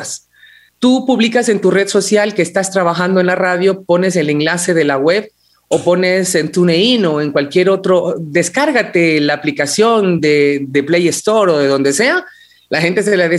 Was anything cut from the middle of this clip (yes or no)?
no